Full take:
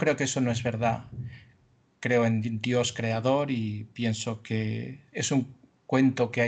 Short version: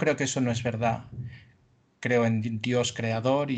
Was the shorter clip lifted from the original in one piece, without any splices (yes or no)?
yes